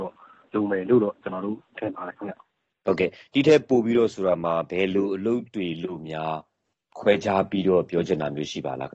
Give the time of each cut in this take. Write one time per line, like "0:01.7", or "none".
none